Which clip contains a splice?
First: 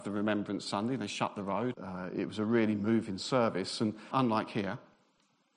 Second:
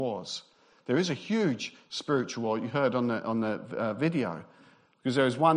first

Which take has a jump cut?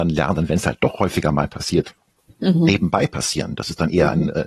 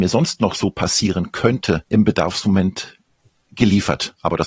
second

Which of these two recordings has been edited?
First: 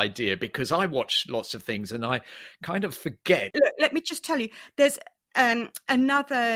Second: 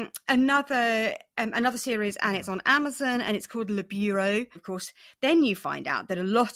second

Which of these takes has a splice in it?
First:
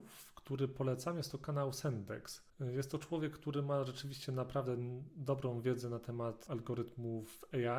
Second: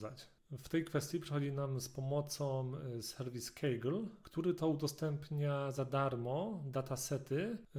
first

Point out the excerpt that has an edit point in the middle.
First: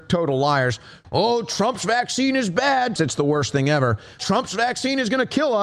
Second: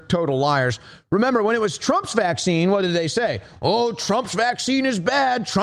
first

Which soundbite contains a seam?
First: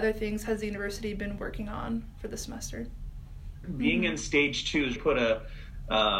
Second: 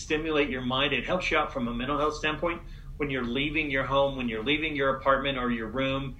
first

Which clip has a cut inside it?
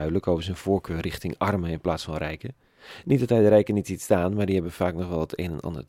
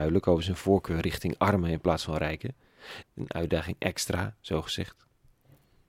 second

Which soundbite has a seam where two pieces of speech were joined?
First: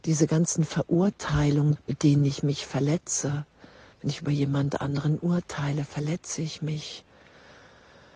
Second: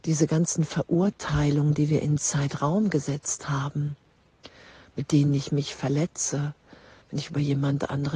first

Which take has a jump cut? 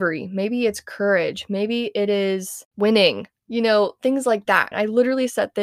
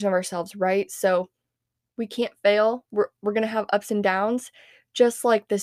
first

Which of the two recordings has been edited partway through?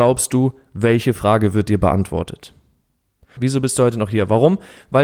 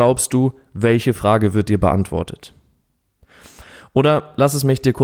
first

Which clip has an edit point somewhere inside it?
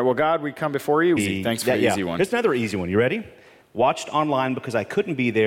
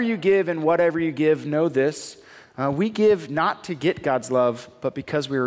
first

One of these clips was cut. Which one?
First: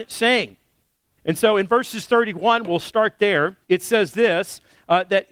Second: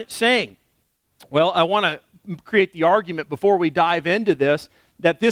first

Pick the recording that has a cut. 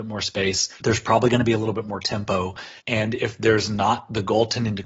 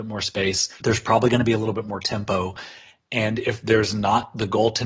first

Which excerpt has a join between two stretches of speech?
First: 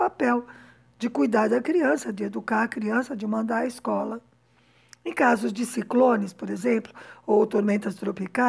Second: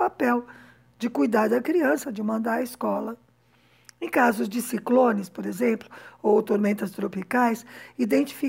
second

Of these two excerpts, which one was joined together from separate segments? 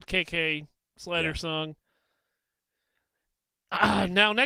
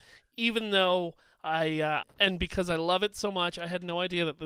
second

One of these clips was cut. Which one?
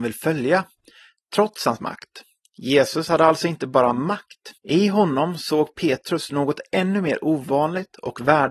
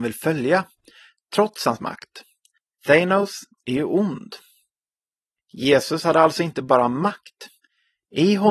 first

